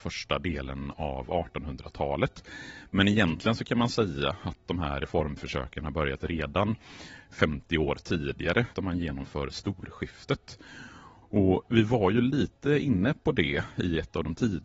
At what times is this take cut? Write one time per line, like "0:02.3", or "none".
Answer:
0:08.7
0:11.2